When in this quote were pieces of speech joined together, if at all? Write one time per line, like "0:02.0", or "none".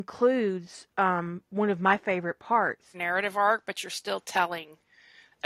0:02.9